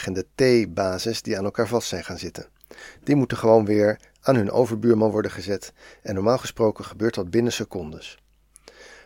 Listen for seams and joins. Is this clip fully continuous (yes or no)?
yes